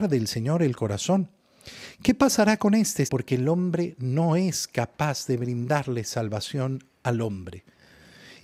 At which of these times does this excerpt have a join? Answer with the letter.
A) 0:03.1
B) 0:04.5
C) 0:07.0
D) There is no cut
A